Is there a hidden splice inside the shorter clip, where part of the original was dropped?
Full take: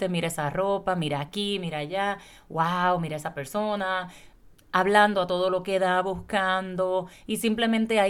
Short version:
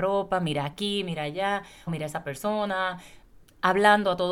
yes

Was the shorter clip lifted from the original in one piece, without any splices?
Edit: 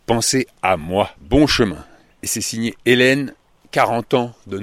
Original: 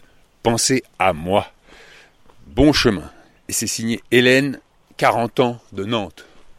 no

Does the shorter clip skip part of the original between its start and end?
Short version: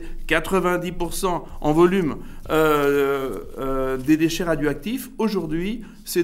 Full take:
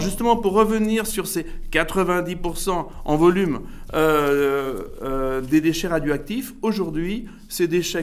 no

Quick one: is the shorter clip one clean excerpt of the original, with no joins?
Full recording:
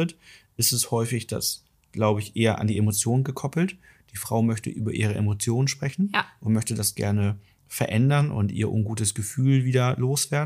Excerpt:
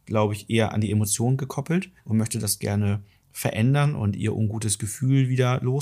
no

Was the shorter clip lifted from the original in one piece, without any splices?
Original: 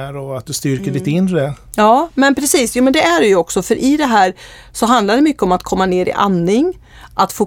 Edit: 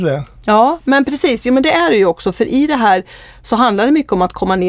yes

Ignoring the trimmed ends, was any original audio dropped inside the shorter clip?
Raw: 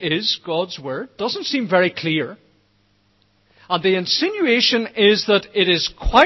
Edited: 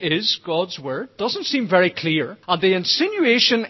yes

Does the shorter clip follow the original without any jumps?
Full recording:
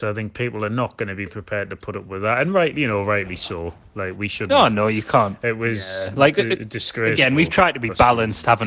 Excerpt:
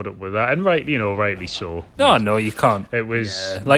no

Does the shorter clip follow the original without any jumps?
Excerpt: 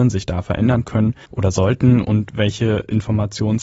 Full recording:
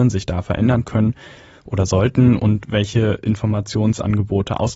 no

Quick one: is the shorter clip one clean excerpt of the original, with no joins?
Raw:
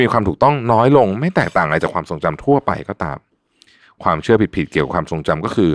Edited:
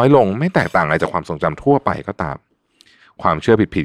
yes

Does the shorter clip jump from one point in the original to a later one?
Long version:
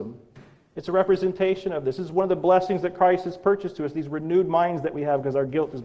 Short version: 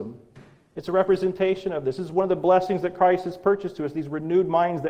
no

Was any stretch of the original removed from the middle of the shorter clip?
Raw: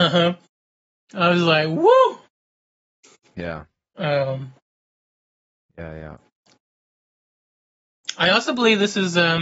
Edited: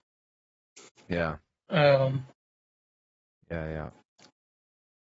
no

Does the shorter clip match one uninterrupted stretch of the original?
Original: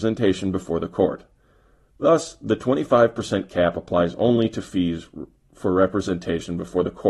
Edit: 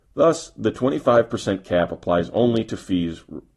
yes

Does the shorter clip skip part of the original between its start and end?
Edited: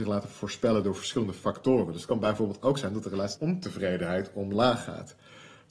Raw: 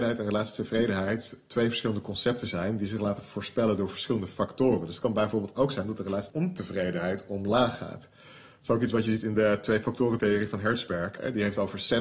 no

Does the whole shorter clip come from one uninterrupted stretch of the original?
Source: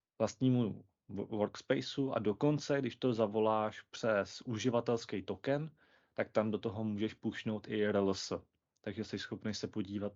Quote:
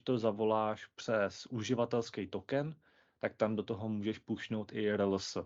yes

